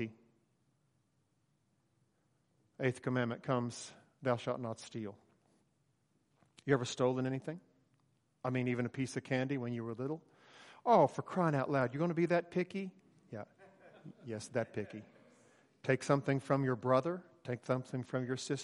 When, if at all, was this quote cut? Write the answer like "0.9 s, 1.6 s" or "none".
none